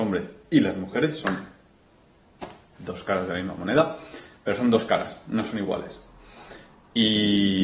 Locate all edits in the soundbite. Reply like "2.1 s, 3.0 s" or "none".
none